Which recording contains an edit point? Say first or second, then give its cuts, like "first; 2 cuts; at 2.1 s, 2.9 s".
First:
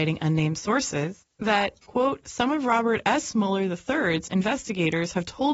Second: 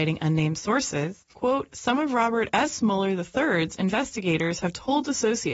second; 1 cut; at 1.3 s